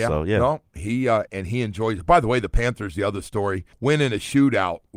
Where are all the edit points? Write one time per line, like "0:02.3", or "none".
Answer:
0:01.3
0:03.7